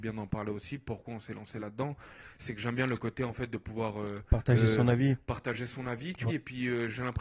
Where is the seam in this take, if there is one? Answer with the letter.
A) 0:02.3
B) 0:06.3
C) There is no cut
B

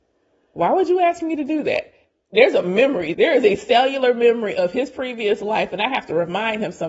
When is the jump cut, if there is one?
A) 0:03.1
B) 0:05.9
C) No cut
A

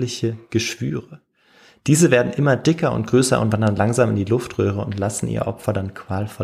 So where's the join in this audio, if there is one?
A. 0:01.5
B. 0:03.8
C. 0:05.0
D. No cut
D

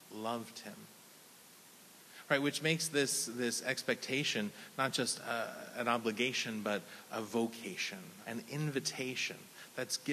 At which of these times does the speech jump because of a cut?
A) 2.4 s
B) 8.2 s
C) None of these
B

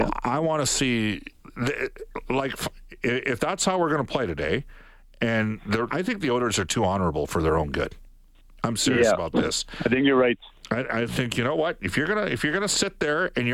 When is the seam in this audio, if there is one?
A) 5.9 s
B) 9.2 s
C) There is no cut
A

